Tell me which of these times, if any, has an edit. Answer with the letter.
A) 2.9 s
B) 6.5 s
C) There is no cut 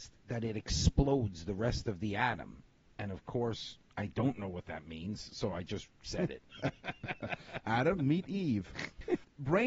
B